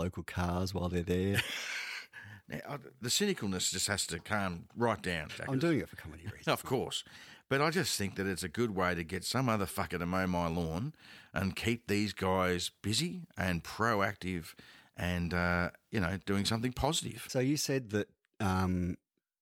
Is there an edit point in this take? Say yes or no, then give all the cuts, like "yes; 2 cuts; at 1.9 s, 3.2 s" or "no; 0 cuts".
yes; 1 cut; at 3.0 s